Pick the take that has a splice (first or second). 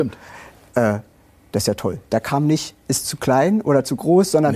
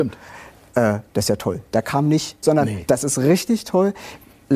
second